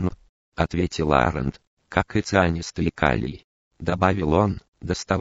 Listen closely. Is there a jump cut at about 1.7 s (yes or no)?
yes